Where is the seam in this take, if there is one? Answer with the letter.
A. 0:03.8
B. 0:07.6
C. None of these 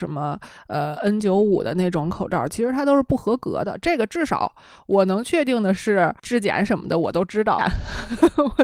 B